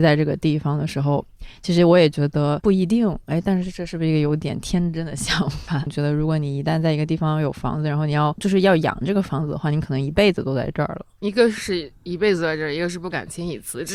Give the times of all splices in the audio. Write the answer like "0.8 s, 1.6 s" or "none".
5.9 s